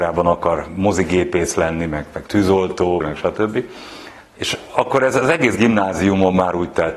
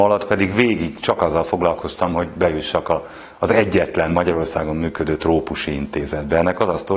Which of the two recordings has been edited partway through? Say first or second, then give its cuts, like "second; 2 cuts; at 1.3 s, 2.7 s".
first; 2 cuts; at 3.0 s, 4.2 s